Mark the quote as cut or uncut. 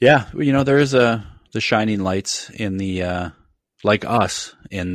uncut